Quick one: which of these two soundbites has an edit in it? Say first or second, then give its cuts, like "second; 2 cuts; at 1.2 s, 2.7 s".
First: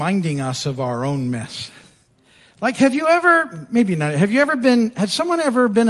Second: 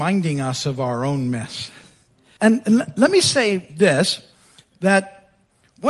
second; 1 cut; at 2.4 s